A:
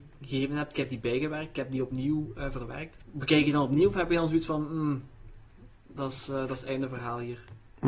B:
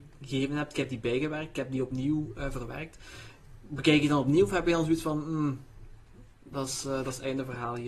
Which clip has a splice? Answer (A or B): A